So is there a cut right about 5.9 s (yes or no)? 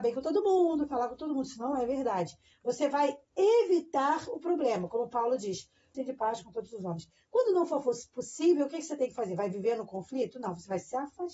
yes